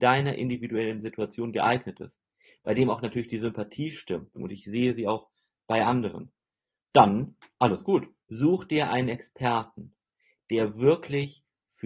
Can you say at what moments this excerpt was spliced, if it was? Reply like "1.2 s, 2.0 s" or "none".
4.4 s, 6.8 s, 8.2 s